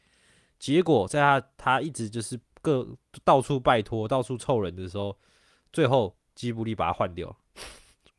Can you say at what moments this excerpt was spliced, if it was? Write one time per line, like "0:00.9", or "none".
none